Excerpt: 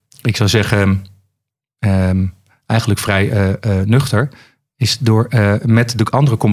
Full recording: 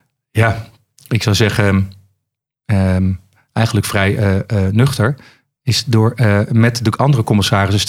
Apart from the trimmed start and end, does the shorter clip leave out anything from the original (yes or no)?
no